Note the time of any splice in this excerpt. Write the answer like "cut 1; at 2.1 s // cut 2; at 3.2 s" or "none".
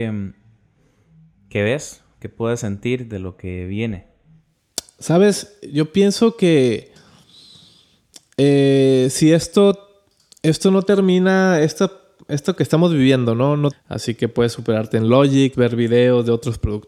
cut 1; at 13.7 s // cut 2; at 15.5 s